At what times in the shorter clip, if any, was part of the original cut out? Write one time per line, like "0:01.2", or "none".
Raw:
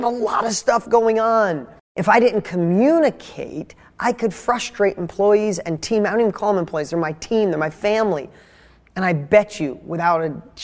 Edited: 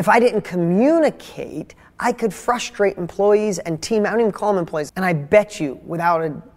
0:04.9